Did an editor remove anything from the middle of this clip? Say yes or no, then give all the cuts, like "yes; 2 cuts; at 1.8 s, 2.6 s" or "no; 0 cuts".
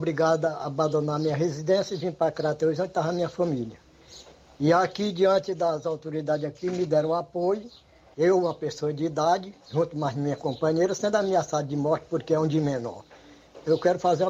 yes; 1 cut; at 8.1 s